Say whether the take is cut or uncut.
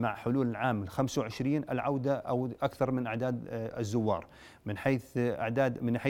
uncut